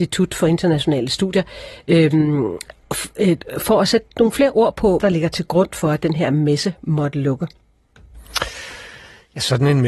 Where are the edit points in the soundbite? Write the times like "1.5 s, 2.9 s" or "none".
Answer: 5.0 s